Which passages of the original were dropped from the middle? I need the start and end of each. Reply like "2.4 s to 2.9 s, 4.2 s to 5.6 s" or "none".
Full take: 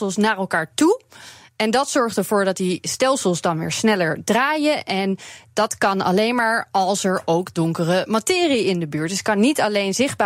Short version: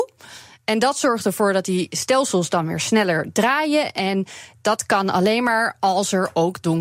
none